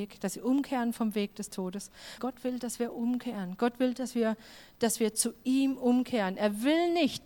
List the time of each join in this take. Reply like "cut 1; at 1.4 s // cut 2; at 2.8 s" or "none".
cut 1; at 2.2 s